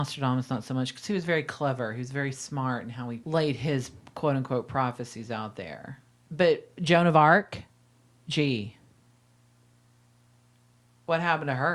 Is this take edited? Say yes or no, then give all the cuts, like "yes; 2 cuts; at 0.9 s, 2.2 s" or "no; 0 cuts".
no; 0 cuts